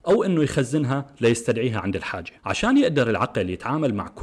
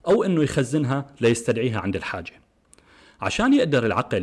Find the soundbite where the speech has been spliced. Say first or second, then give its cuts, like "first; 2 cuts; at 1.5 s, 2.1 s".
first; 1 cut; at 2.4 s